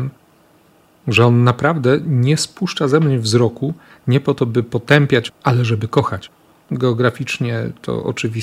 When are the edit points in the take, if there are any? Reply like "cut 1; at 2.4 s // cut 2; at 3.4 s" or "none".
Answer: cut 1; at 5.3 s // cut 2; at 6.6 s